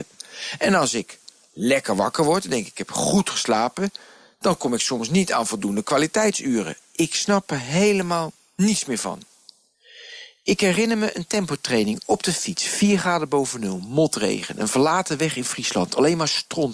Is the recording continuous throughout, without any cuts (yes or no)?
yes